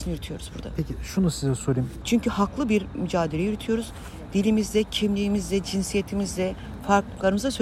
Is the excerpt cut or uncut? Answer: cut